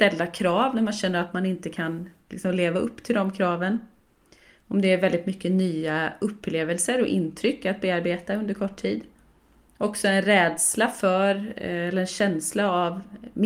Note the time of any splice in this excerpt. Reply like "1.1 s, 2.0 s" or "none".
none